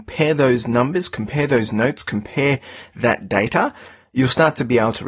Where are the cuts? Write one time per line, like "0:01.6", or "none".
none